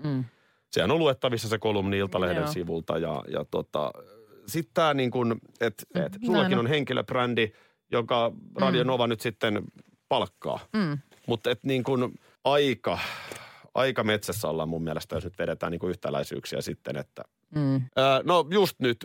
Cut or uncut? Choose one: cut